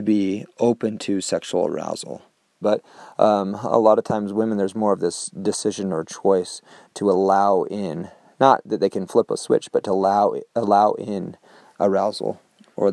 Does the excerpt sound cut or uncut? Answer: cut